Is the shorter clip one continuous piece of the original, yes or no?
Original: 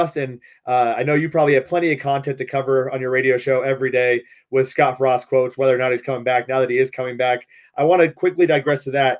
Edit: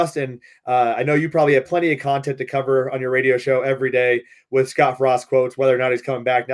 yes